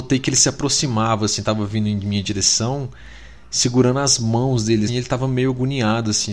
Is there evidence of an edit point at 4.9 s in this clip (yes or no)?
yes